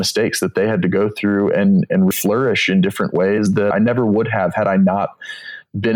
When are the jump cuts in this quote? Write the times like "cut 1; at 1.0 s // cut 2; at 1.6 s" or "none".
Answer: cut 1; at 2.1 s // cut 2; at 3.7 s